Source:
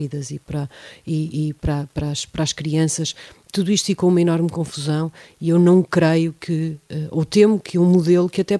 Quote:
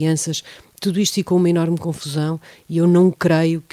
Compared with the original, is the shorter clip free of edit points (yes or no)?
yes